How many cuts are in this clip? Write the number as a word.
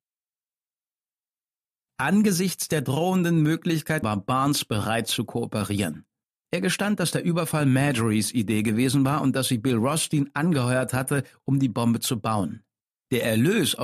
one